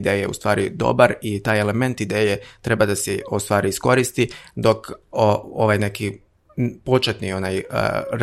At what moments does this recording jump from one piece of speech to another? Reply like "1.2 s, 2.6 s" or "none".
5.0 s